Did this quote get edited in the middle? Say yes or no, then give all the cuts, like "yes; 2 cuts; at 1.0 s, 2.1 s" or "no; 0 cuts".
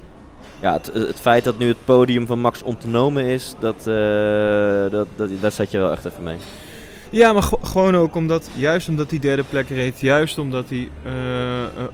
no; 0 cuts